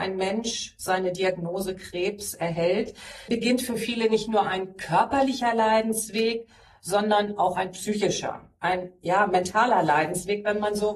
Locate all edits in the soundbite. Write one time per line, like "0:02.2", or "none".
0:03.3